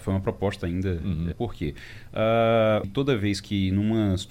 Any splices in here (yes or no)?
yes